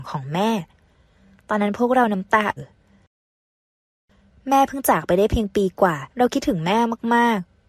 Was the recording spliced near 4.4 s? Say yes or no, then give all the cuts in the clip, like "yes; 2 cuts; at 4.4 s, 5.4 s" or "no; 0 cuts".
no; 2 cuts; at 2.6 s, 6.1 s